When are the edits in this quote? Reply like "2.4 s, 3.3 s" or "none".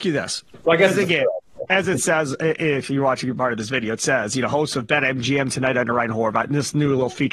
none